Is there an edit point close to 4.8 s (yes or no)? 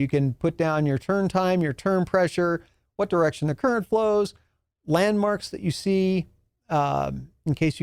no